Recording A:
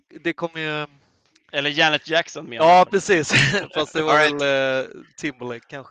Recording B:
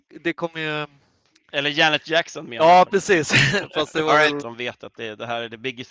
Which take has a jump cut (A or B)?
B